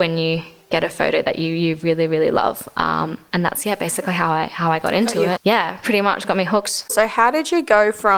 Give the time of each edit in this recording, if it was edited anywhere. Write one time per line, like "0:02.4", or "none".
0:05.4
0:06.9